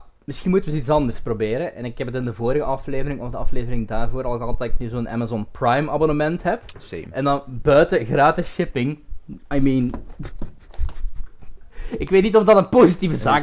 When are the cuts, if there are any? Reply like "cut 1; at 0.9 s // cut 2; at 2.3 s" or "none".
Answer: none